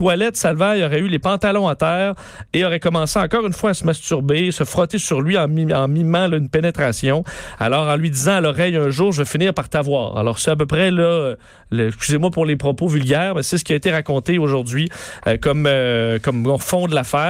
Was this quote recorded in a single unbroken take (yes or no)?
yes